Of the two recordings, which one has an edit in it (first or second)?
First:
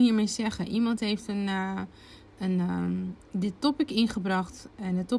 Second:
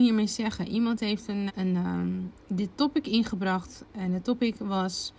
second